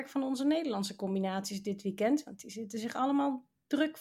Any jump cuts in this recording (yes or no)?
no